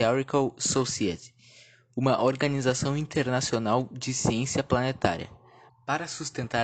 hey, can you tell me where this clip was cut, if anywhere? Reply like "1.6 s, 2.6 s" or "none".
5.7 s